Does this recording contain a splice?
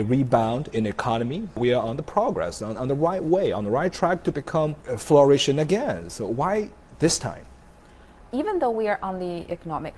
no; 0 cuts

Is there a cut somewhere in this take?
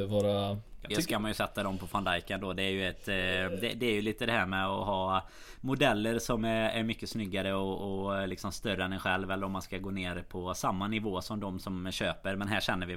yes; 1 cut; at 0.9 s

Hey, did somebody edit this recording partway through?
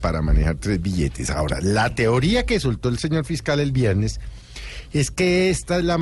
no; 0 cuts

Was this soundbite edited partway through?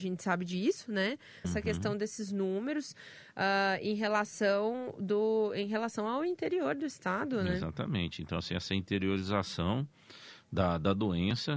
yes; 1 cut; at 1.4 s

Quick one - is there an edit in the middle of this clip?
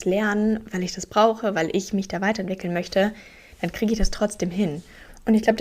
no; 0 cuts

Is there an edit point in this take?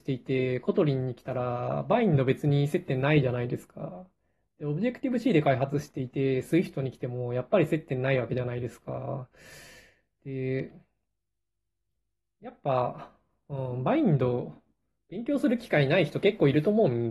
no; 0 cuts

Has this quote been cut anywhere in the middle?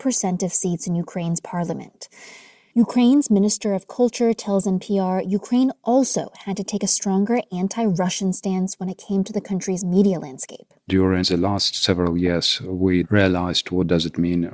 yes; 1 cut; at 13.0 s

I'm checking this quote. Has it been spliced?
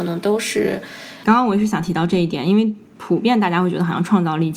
yes; 1 cut; at 1.2 s

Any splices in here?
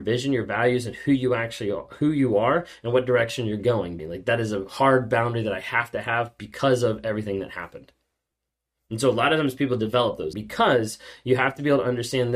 yes; 2 cuts; at 4.0 s, 10.3 s

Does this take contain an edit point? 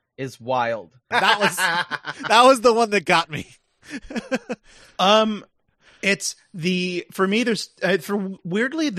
yes; 1 cut; at 1.1 s

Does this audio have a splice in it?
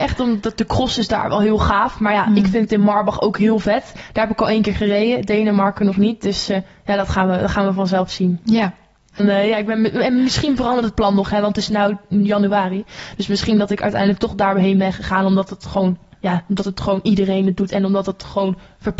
yes; 1 cut; at 9.2 s

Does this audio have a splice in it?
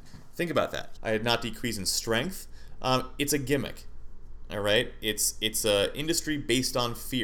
yes; 1 cut; at 1.0 s

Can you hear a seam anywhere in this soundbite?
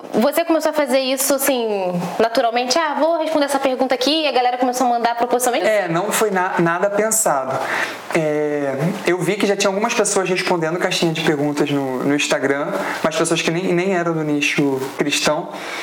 yes; 1 cut; at 5.6 s

